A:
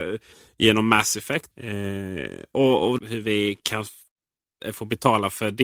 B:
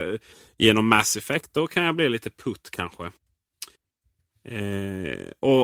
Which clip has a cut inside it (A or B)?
A